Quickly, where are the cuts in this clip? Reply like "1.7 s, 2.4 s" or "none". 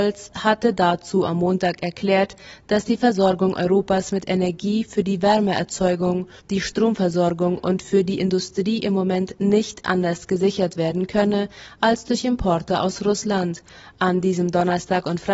6.4 s